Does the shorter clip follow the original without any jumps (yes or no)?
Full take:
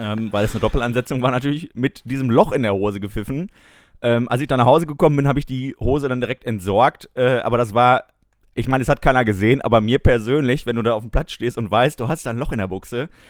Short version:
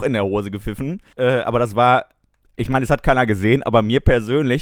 no